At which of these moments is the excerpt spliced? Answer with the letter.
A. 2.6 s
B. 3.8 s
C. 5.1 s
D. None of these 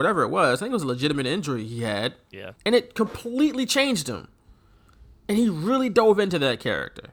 A